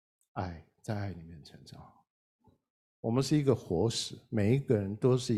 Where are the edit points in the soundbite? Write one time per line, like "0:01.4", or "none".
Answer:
0:02.8